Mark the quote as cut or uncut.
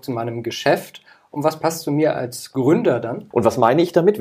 cut